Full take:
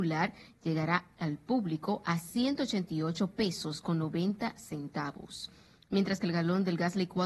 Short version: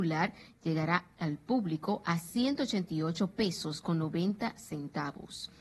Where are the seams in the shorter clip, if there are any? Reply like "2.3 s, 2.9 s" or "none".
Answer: none